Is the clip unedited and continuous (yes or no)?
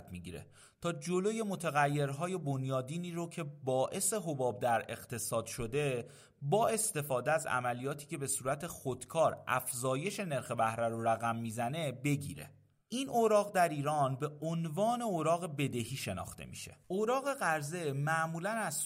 no